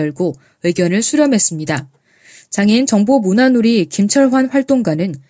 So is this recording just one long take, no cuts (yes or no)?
yes